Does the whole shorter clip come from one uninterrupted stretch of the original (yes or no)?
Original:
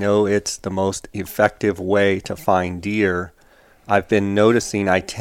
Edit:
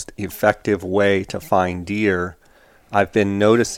yes